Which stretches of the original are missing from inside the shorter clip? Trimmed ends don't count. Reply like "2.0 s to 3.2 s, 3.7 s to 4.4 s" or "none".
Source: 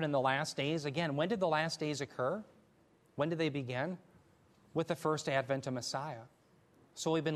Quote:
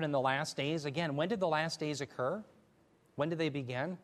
none